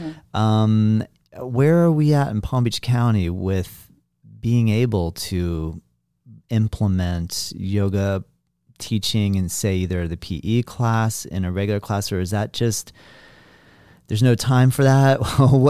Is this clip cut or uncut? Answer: uncut